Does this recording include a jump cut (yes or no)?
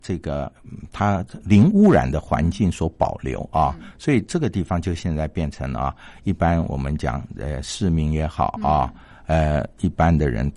no